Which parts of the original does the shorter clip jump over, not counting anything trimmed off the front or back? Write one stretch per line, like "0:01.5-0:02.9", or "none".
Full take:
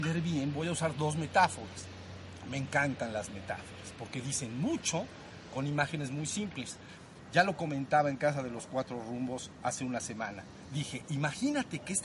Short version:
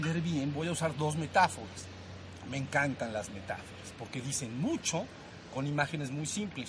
none